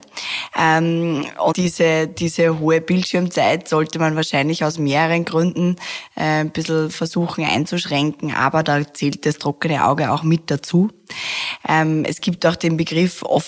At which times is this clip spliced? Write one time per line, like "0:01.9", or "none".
0:01.5

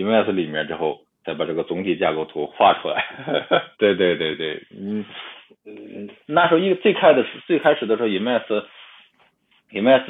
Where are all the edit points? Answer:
0:03.7

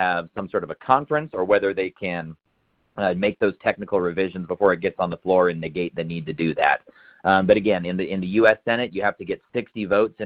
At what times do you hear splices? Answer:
none

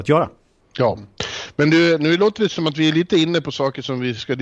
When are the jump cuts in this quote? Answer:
none

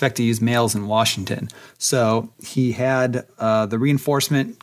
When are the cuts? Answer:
none

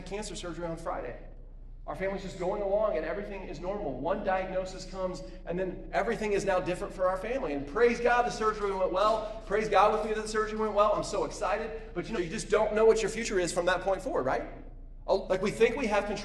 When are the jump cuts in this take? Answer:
0:12.1
0:15.3

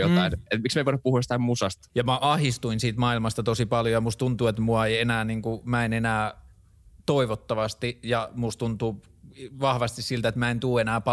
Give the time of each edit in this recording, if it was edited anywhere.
0:01.9

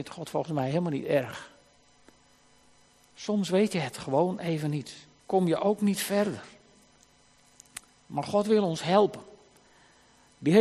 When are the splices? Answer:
0:05.2

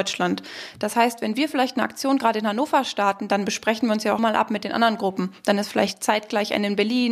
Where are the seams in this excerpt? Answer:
0:04.2

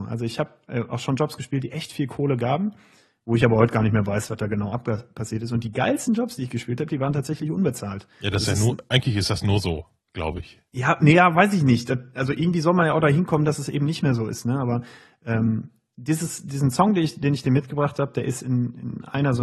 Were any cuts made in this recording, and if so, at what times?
none

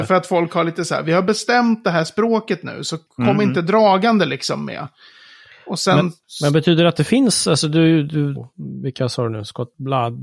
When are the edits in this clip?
0:08.3

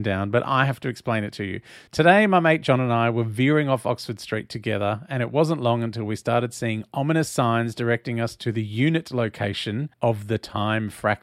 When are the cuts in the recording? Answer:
0:01.9
0:09.9

